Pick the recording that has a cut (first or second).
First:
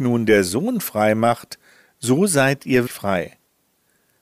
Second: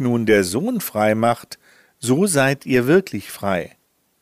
first